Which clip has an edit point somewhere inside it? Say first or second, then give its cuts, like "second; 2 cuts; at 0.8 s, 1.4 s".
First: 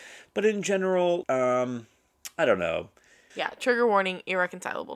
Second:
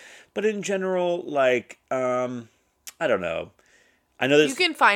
first; 2 cuts; at 1.2 s, 3.3 s